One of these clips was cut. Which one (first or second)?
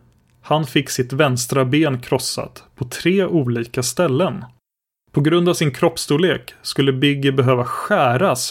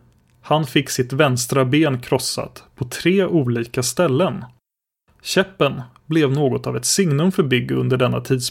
second